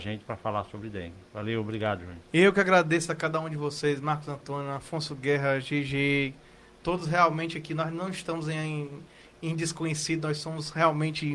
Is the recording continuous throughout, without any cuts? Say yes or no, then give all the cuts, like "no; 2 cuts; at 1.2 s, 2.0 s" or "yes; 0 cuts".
yes; 0 cuts